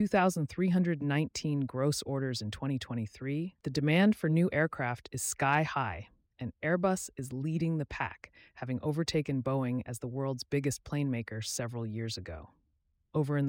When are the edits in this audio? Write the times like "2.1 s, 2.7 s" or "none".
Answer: none